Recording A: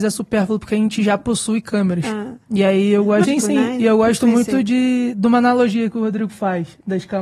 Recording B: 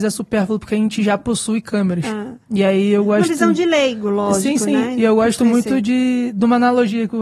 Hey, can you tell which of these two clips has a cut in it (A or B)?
A